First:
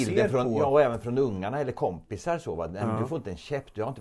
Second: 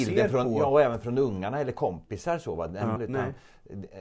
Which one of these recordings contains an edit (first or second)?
second